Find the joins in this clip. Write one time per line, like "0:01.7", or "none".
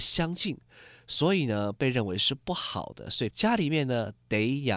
0:03.3